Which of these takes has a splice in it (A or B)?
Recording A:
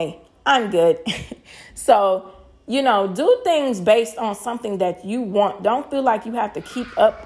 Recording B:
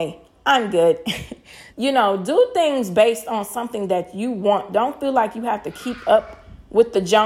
B